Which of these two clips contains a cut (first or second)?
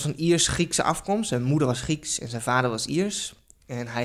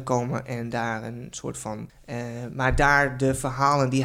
second